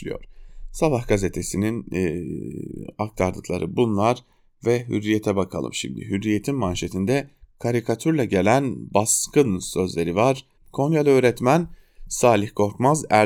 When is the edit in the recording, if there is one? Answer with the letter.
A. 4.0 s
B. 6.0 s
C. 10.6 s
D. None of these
C